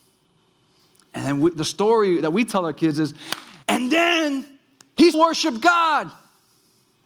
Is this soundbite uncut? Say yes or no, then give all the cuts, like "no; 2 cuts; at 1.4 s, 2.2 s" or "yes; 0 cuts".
no; 3 cuts; at 1.0 s, 3.6 s, 5.1 s